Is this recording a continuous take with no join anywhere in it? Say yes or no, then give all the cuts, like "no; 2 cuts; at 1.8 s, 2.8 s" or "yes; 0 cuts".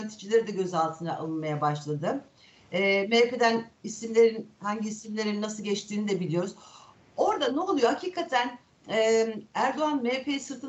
yes; 0 cuts